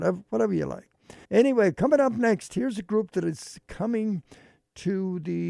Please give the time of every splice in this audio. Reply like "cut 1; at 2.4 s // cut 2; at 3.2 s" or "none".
cut 1; at 1.2 s